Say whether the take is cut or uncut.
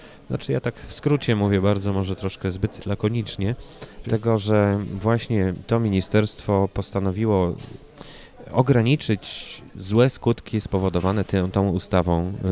cut